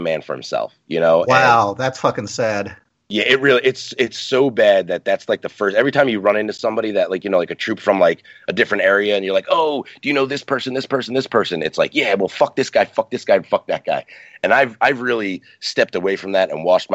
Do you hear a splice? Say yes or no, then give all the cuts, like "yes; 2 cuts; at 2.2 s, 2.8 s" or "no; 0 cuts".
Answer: no; 0 cuts